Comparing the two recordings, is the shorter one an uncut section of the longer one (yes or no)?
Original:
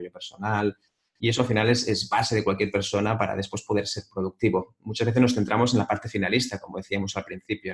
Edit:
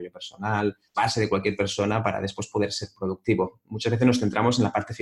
no